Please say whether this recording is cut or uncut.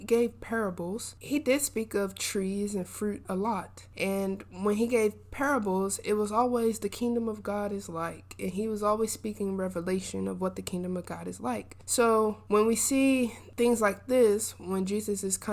uncut